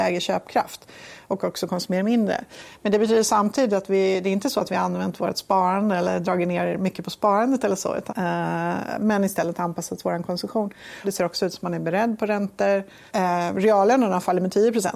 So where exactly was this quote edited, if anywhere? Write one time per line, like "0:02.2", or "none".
0:08.1
0:11.0
0:13.1